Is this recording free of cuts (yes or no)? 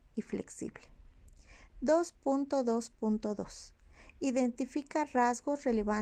yes